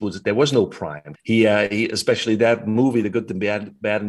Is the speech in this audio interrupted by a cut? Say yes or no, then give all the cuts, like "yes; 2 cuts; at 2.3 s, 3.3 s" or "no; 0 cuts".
yes; 1 cut; at 1.1 s